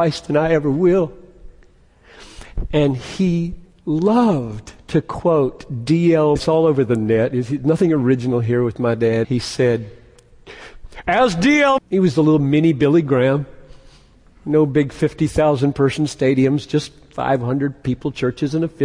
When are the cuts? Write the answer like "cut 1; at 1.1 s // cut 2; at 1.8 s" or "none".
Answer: cut 1; at 6.4 s // cut 2; at 9.2 s // cut 3; at 11.8 s